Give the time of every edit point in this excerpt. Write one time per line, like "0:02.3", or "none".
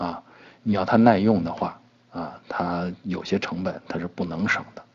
none